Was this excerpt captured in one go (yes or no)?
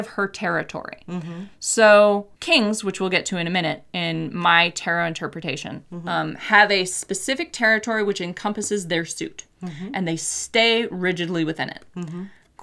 no